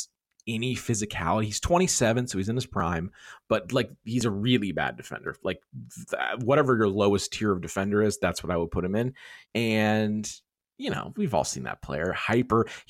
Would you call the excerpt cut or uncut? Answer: cut